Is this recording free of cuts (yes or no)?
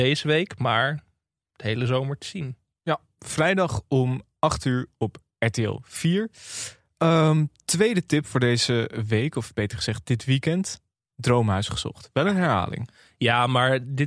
yes